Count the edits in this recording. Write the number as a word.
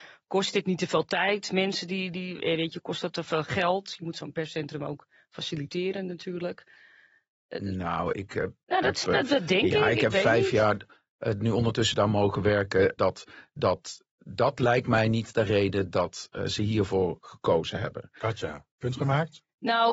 one